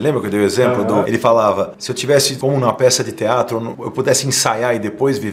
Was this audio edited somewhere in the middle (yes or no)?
yes